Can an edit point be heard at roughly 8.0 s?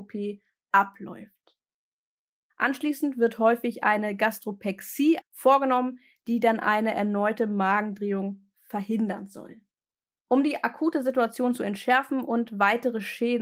no; 3 cuts; at 2.5 s, 5.2 s, 10.2 s

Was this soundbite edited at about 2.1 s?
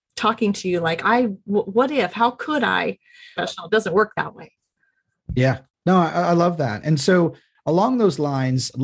no; 1 cut; at 3.4 s

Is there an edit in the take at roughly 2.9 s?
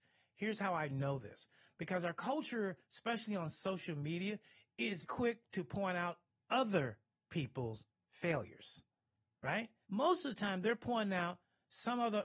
no; 2 cuts; at 5.0 s, 9.8 s

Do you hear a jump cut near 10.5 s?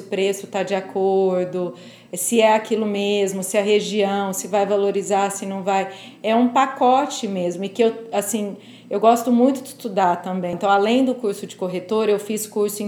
yes; 1 cut; at 10.5 s

